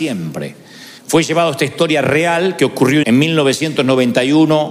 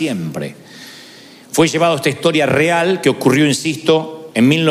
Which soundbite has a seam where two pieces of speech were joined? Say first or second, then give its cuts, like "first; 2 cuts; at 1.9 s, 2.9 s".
first; 2 cuts; at 1.0 s, 3.0 s